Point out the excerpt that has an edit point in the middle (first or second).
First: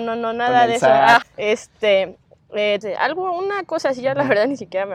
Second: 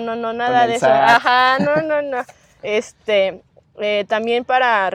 first